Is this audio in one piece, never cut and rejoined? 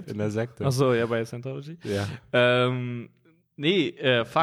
yes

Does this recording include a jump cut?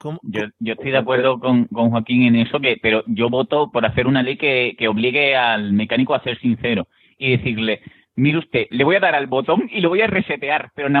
yes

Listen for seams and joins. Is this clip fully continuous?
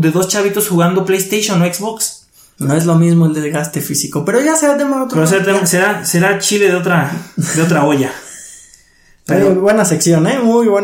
yes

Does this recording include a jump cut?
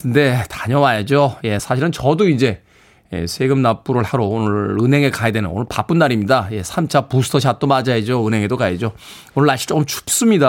no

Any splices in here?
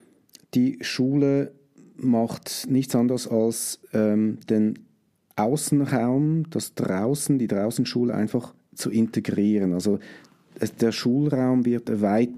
no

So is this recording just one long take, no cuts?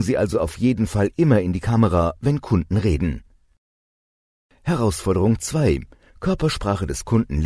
yes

